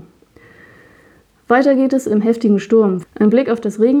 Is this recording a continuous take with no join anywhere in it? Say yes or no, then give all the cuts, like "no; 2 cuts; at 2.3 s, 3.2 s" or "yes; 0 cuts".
no; 1 cut; at 3.0 s